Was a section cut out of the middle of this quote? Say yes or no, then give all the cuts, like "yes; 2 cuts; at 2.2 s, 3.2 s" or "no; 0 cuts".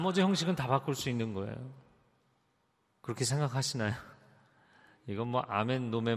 no; 0 cuts